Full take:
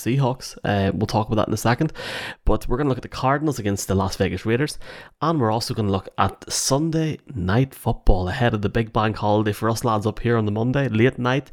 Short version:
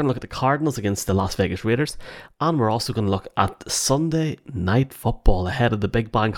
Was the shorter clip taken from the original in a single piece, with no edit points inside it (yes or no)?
yes